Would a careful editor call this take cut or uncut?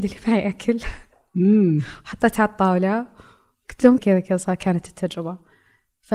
cut